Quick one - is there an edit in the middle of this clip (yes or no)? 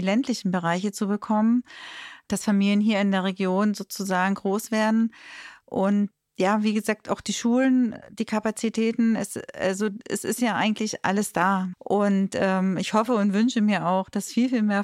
yes